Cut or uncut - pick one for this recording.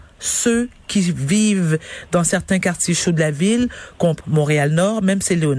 cut